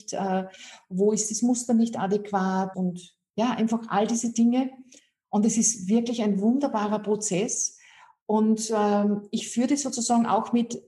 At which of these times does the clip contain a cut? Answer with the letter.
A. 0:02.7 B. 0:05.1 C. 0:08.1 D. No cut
A